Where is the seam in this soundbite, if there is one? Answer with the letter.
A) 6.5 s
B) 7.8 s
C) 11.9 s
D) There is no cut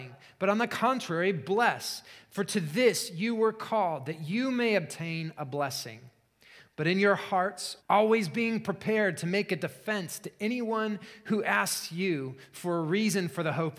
B